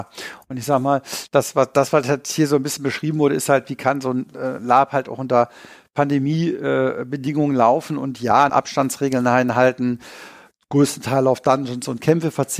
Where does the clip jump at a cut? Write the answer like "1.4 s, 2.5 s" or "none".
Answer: 8.5 s